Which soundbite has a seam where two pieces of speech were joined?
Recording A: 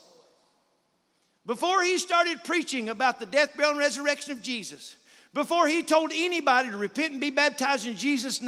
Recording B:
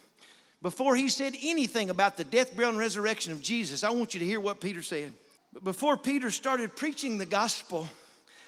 B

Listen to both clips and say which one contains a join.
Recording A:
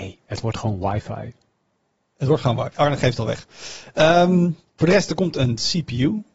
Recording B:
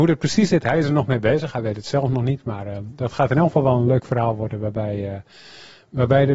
A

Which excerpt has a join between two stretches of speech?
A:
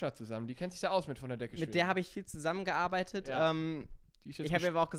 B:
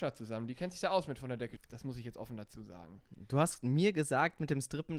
B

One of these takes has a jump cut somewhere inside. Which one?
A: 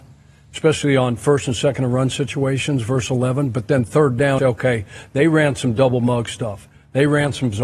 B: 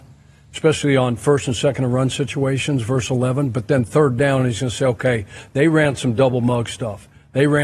A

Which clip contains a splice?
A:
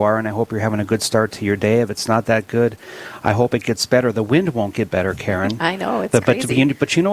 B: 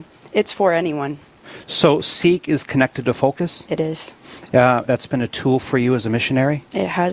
B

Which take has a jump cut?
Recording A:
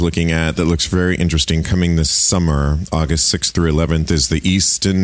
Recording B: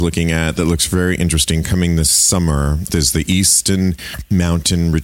B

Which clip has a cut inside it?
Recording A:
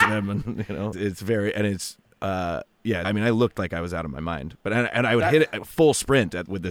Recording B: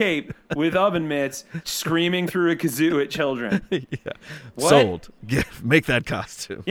A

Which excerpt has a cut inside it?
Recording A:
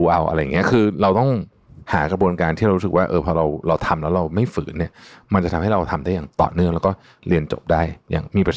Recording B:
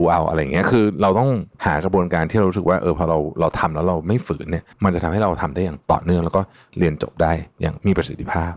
B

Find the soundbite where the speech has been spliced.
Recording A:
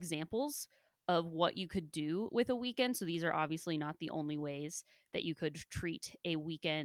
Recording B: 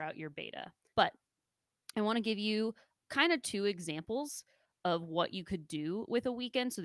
B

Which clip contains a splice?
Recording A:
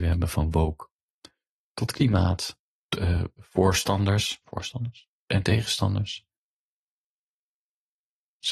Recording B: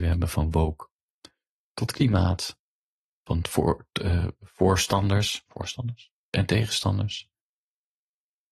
A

